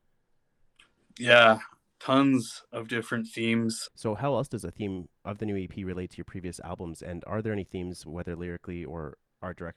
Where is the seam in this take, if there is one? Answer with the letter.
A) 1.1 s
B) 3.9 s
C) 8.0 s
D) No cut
B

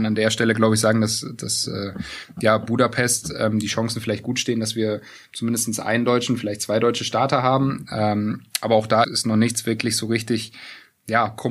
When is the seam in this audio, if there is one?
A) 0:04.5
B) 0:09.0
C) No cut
B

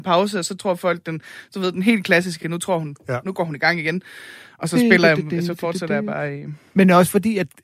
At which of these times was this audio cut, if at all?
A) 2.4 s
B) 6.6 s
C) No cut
C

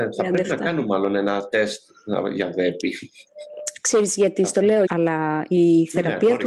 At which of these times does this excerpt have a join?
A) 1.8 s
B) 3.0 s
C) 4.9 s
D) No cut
C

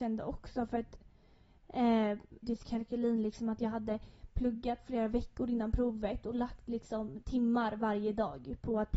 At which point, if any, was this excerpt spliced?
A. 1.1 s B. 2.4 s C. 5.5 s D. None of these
B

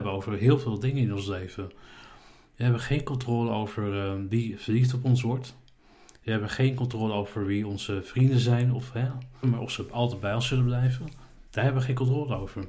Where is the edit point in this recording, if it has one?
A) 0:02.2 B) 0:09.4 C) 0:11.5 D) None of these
B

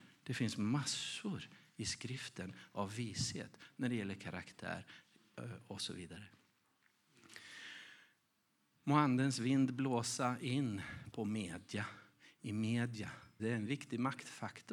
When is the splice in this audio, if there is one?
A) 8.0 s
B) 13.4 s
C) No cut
B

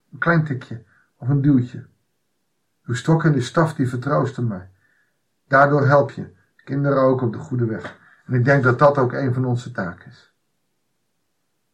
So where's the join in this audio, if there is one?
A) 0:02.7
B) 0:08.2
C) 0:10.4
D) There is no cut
D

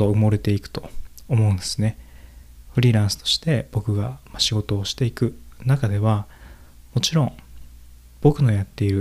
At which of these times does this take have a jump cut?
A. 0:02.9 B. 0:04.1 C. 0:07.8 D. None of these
D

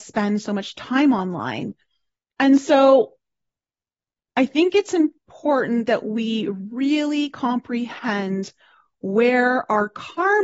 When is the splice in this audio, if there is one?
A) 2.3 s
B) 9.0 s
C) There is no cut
A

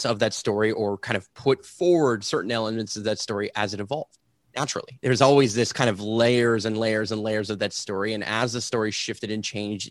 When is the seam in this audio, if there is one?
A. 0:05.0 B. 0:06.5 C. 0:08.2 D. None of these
A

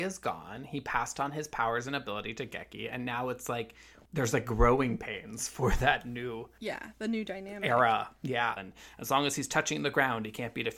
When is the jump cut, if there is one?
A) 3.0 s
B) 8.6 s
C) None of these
B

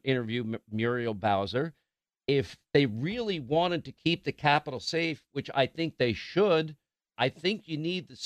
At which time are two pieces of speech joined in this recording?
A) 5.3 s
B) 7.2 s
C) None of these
B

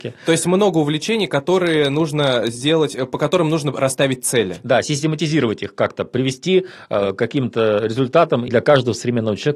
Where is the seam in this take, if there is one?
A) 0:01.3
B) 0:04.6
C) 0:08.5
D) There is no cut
C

